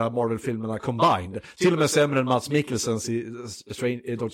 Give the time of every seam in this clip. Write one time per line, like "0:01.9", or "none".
none